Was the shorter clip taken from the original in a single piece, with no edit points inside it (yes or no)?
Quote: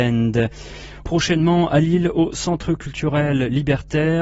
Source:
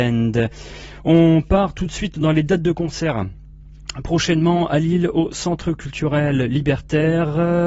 no